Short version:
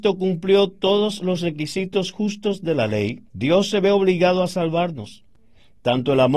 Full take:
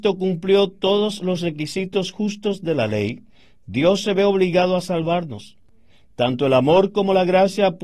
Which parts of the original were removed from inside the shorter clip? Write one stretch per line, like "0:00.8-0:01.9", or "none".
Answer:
0:03.3-0:03.6